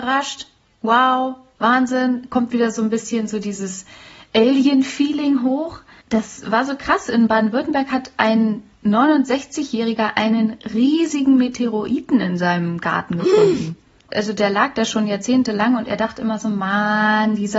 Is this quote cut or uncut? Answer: cut